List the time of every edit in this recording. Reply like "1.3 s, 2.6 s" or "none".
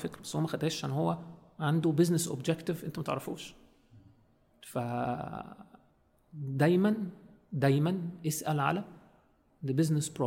none